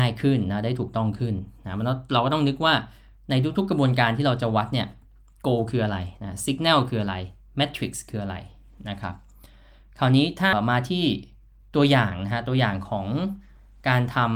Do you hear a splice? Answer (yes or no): yes